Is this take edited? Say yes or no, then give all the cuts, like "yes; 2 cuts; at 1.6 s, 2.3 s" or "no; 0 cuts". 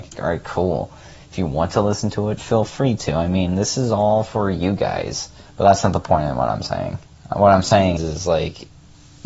yes; 2 cuts; at 5.5 s, 8.0 s